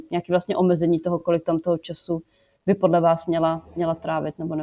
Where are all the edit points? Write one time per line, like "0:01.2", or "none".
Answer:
none